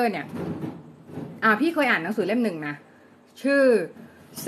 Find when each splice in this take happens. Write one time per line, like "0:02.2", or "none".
none